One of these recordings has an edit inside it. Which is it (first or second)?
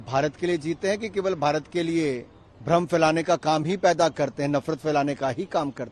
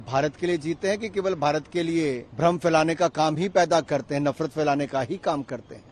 second